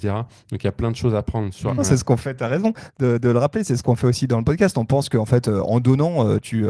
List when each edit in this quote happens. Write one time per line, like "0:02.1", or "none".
0:01.8